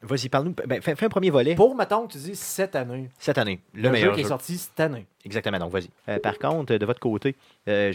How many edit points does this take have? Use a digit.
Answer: 1